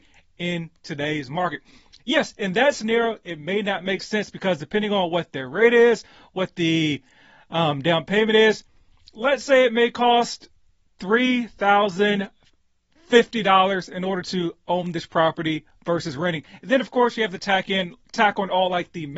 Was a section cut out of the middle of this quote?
yes; 1 cut; at 2.0 s

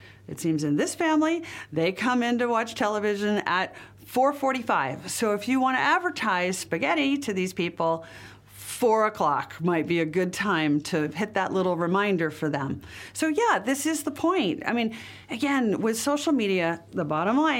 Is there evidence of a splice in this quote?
no; 0 cuts

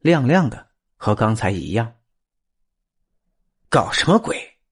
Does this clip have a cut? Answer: no; 0 cuts

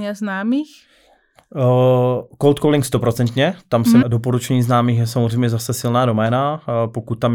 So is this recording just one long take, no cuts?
no; 1 cut; at 4.0 s

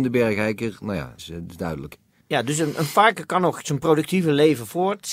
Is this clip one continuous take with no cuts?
no; 1 cut; at 1.2 s

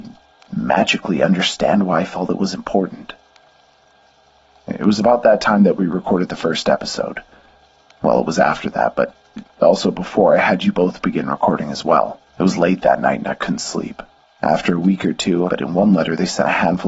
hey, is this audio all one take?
no; 3 cuts; at 12.3 s, 14.2 s, 15.5 s

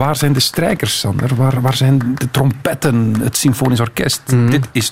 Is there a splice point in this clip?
no; 0 cuts

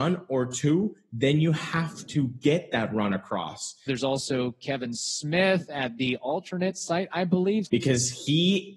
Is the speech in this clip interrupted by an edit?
yes; 2 cuts; at 3.9 s, 7.7 s

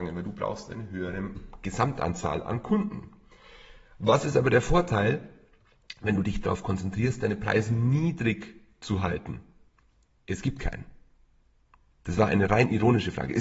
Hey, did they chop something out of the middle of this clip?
no; 0 cuts

